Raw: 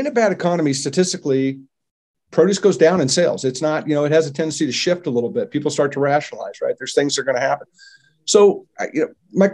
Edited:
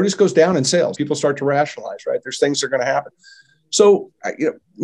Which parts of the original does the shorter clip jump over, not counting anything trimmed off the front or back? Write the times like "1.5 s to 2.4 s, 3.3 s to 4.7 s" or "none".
3.4 s to 5.5 s